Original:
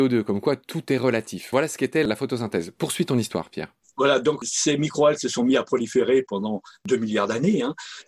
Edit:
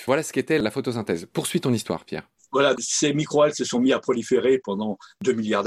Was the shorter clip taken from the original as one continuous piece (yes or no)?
no